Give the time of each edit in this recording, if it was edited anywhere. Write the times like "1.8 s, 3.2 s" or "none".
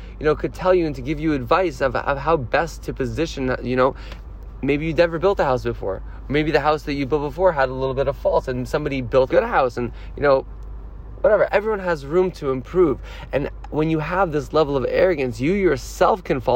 9.3 s, 11.5 s